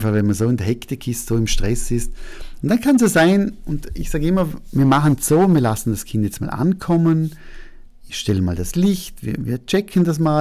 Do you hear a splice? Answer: yes; 1 cut; at 2.6 s

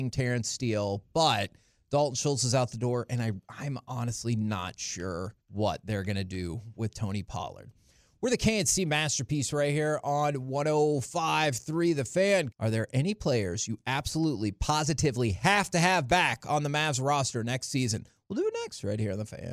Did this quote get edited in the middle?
yes; 2 cuts; at 5.4 s, 12.5 s

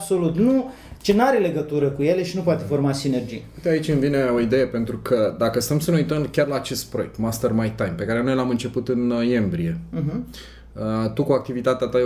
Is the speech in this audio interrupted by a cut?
no; 0 cuts

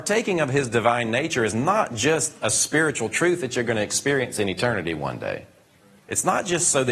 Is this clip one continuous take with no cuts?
no; 1 cut; at 6.0 s

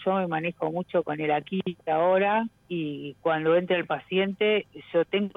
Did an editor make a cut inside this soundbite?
yes; 1 cut; at 1.8 s

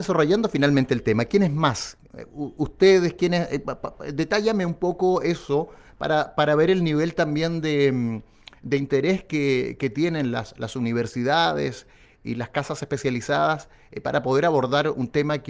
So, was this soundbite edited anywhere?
no; 0 cuts

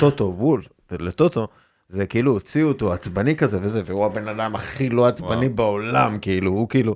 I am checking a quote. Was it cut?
no; 0 cuts

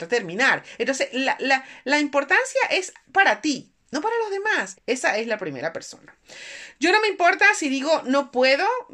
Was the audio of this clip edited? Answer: yes; 1 cut; at 4.7 s

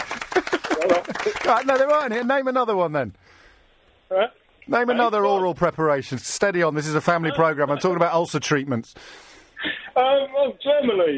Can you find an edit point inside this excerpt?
no; 0 cuts

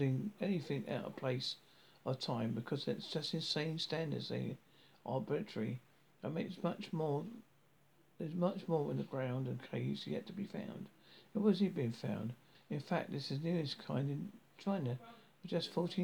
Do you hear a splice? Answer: yes; 1 cut; at 12.5 s

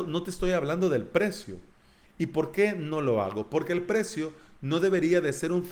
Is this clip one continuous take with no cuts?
yes; 0 cuts

